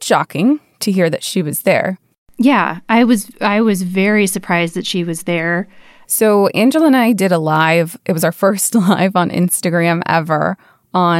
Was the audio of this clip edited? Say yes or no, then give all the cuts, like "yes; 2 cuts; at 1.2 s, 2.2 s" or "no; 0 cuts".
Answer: yes; 1 cut; at 6.0 s